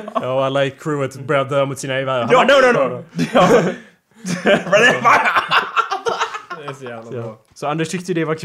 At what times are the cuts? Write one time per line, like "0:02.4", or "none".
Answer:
0:02.7